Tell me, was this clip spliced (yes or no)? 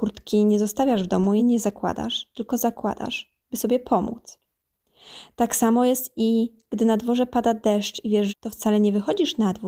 yes